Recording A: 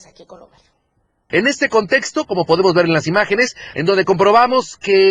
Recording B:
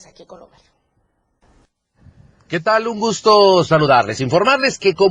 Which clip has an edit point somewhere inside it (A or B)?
A